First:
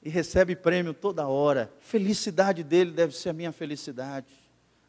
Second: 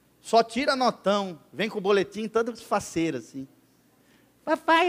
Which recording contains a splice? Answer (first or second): first